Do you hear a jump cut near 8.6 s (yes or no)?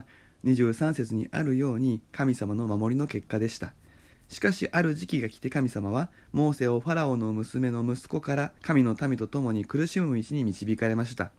yes